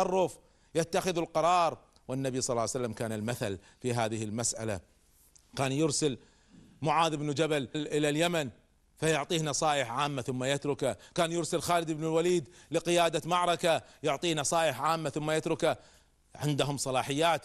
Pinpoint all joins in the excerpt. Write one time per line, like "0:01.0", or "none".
0:07.7